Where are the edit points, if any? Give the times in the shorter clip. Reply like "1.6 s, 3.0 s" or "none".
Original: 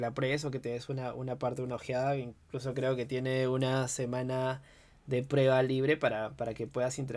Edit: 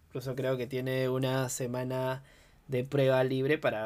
none